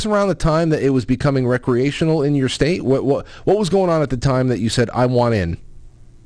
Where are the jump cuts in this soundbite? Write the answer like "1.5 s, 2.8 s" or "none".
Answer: none